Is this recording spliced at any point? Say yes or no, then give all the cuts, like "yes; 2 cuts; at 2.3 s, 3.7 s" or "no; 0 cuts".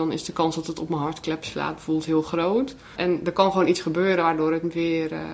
yes; 1 cut; at 3.0 s